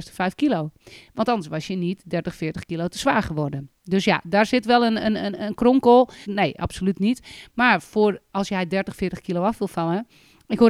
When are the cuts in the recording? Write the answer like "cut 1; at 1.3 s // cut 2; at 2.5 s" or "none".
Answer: cut 1; at 6.2 s